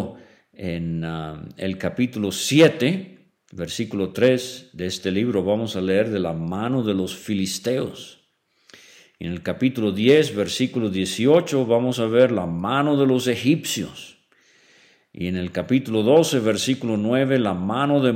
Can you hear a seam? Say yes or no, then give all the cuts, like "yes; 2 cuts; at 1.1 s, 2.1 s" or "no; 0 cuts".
no; 0 cuts